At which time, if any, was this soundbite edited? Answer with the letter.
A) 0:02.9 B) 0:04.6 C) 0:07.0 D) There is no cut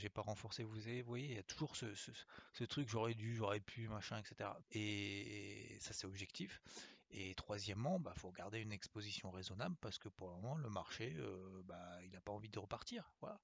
B